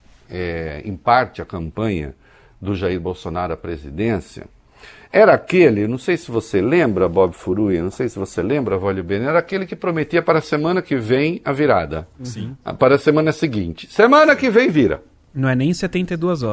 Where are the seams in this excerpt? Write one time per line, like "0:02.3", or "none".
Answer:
none